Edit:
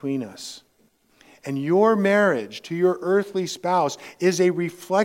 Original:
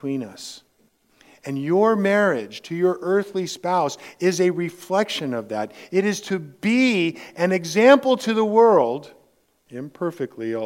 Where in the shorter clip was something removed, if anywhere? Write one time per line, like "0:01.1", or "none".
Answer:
none